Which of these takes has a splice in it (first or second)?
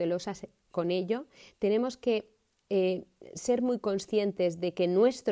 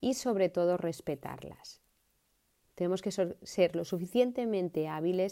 second